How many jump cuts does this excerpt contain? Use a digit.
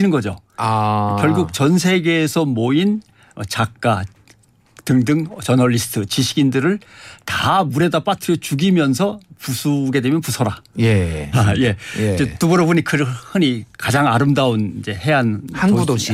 1